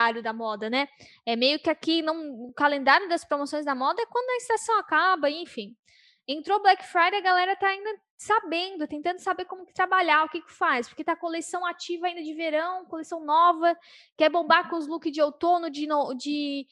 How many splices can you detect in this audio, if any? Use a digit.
0